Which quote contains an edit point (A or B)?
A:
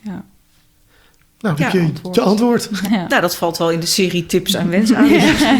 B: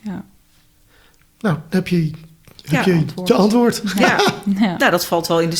A